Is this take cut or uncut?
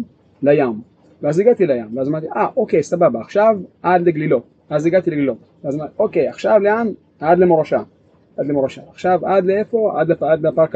uncut